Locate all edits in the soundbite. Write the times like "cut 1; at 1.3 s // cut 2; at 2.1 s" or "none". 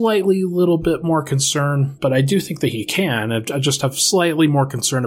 cut 1; at 2.0 s